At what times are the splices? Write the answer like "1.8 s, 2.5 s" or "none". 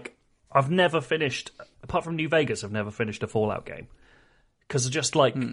1.7 s